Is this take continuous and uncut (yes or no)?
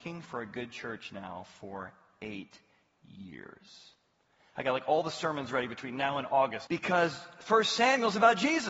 no